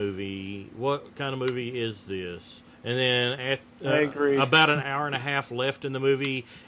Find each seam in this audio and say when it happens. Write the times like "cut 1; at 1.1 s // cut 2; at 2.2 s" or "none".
cut 1; at 2.7 s // cut 2; at 4.8 s